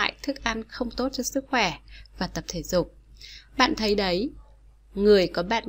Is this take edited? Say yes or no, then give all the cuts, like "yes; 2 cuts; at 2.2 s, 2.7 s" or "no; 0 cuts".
no; 0 cuts